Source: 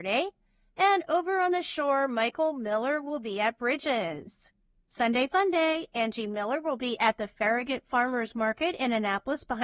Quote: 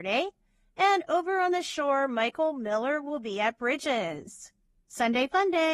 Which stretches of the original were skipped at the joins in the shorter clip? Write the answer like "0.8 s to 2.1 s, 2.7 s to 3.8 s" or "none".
none